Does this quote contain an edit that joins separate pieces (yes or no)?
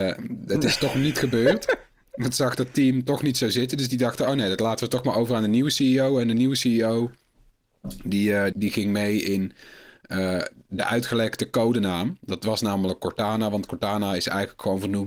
yes